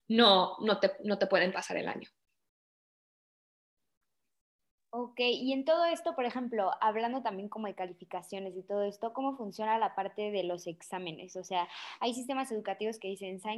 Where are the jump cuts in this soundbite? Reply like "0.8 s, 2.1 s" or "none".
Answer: none

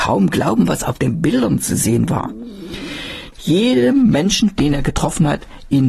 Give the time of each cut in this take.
3.3 s

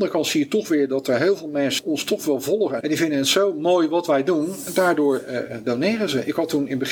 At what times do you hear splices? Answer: none

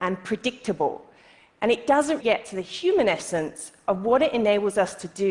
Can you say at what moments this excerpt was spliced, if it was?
2.2 s

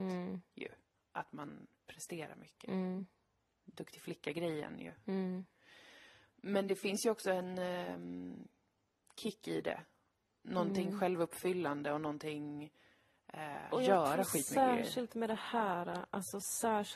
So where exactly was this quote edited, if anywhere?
13.7 s

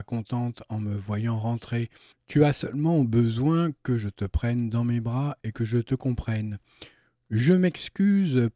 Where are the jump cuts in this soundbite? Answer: 2.1 s

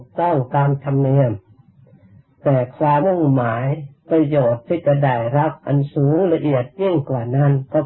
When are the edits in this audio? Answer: 3.0 s

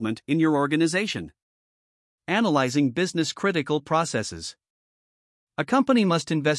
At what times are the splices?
none

